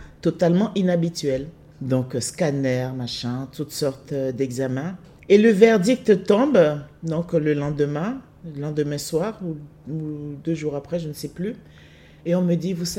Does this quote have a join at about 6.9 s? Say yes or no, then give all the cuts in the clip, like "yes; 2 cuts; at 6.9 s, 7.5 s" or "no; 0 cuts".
no; 0 cuts